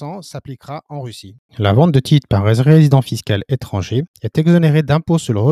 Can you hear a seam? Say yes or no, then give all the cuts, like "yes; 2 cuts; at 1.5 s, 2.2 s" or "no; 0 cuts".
no; 0 cuts